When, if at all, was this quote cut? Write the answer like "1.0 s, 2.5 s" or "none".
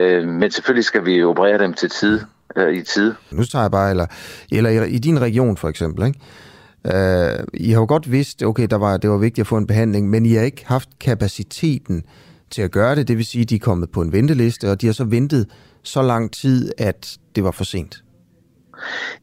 3.3 s